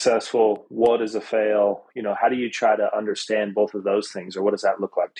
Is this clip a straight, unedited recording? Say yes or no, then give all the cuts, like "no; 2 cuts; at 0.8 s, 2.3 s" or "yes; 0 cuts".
yes; 0 cuts